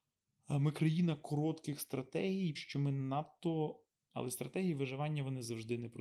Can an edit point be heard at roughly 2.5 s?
yes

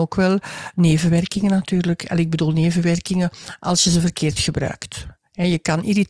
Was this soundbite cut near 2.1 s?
no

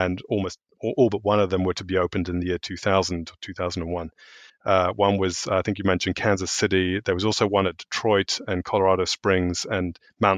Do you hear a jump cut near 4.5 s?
yes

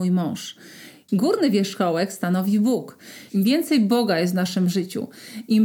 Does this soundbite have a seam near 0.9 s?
no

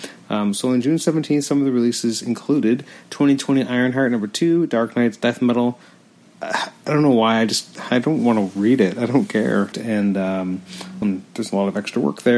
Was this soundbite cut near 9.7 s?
yes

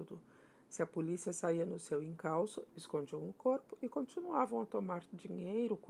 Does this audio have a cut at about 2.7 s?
yes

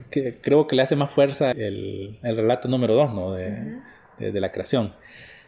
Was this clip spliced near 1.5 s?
yes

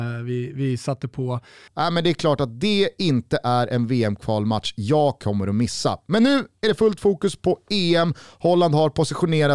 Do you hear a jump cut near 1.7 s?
yes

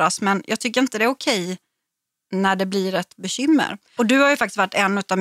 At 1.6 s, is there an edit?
no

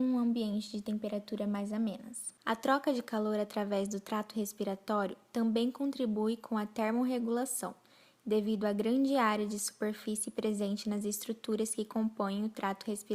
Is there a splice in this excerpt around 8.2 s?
no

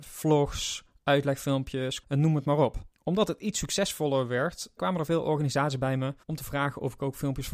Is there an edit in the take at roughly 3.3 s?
no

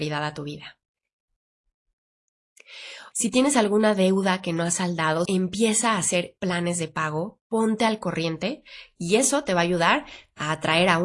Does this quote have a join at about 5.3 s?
yes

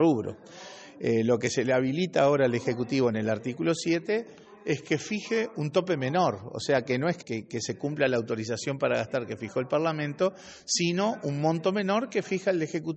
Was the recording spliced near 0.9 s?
no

